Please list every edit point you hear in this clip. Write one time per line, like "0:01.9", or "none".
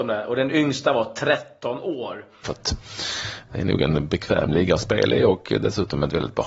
0:02.4